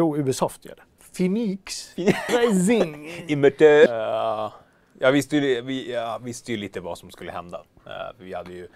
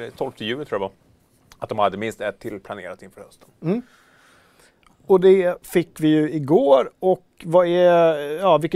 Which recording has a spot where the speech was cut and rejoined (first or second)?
first